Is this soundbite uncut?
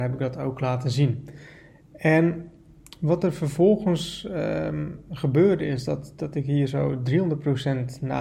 yes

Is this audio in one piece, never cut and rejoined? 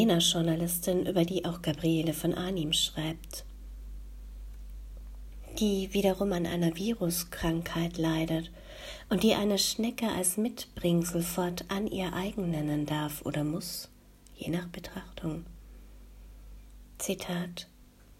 no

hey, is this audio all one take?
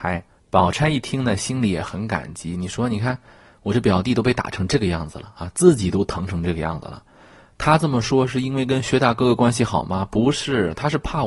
yes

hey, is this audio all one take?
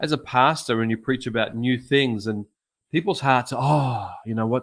yes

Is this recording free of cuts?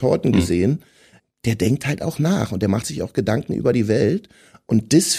yes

